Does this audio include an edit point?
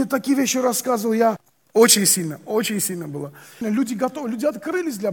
yes; 2 cuts; at 1.7 s, 3.6 s

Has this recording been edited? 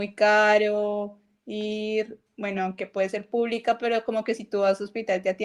no; 0 cuts

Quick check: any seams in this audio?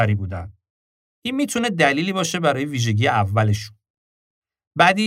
yes; 1 cut; at 1.1 s

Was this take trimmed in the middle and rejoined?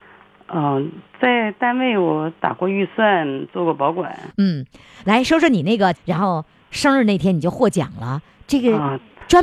yes; 1 cut; at 5.9 s

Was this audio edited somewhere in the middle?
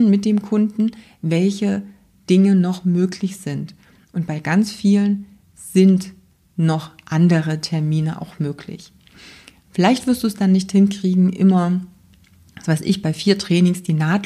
no; 0 cuts

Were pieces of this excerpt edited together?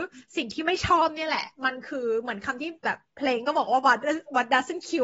no; 0 cuts

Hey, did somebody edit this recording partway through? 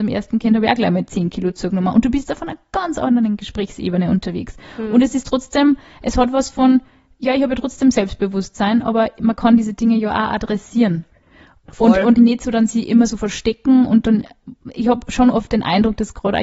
yes; 1 cut; at 12.2 s

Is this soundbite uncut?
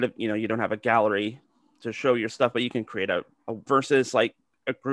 no; 1 cut; at 3.7 s

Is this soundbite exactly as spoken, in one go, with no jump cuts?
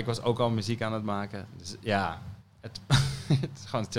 yes; 0 cuts

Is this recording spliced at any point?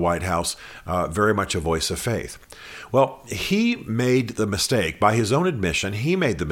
no; 0 cuts

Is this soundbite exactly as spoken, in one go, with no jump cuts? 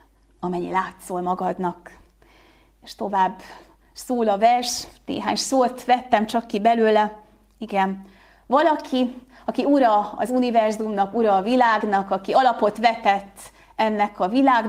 yes; 0 cuts

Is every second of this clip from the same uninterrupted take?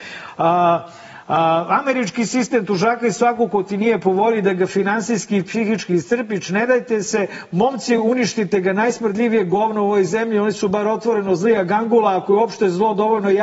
yes; 0 cuts

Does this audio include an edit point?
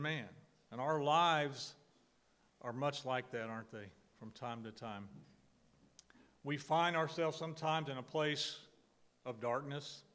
no; 0 cuts

